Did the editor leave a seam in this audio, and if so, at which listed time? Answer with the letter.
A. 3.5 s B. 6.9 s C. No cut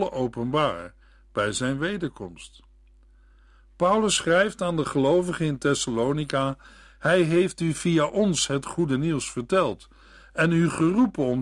C